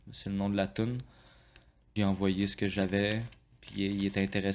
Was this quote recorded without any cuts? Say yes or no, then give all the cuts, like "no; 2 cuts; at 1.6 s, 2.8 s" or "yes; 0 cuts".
no; 1 cut; at 2.0 s